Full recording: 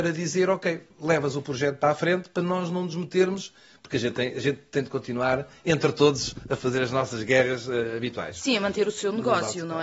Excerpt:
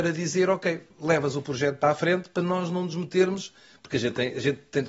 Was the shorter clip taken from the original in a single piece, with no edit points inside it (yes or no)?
yes